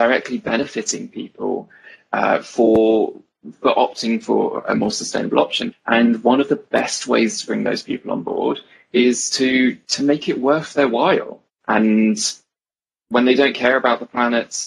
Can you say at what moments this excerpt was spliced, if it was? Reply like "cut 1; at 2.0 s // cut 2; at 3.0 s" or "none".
cut 1; at 5.7 s // cut 2; at 11.6 s